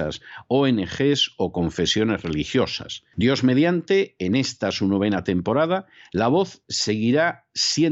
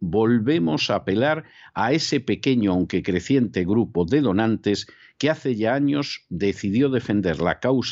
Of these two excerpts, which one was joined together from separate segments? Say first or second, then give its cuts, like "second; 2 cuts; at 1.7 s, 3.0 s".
first; 1 cut; at 3.1 s